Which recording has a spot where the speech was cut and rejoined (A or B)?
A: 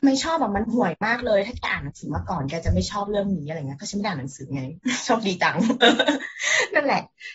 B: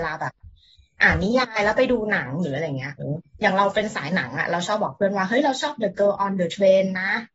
B